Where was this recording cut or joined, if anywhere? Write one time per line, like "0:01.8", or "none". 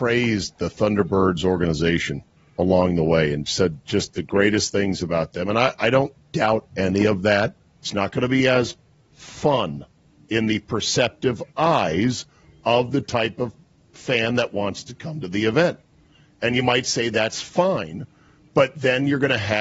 0:07.8